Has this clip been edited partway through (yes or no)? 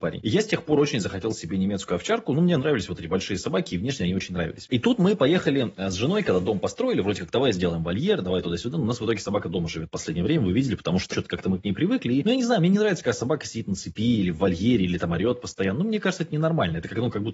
yes